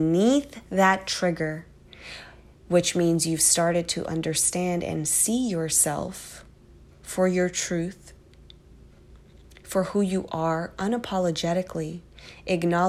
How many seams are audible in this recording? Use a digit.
0